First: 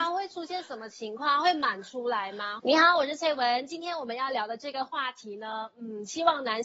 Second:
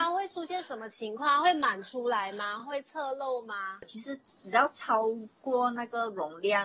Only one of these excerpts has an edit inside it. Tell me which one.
first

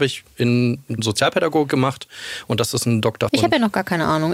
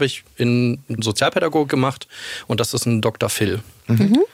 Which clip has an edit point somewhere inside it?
first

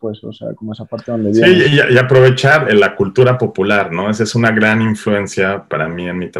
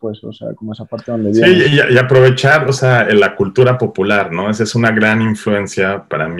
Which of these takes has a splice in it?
first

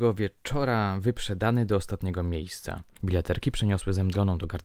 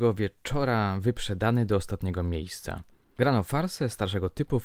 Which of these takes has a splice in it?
first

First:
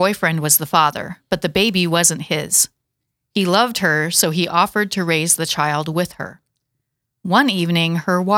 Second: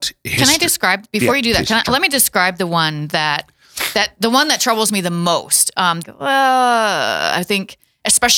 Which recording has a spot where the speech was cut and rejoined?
second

